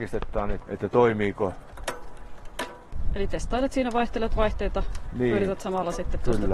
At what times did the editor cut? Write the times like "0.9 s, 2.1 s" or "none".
none